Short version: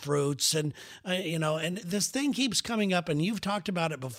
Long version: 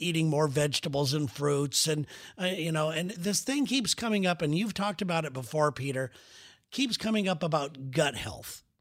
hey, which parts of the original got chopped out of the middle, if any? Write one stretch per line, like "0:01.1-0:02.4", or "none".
none